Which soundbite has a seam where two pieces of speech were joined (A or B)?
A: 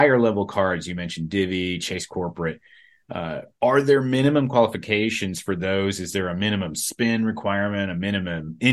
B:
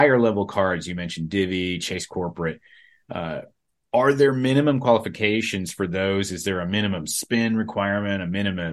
A